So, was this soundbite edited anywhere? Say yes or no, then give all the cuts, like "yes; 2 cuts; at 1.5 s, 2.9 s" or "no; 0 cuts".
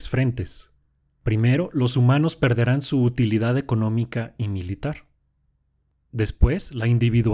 no; 0 cuts